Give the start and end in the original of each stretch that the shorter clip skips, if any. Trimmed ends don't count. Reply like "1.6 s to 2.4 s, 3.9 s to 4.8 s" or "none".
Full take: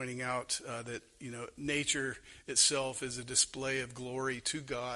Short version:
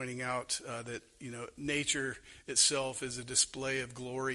none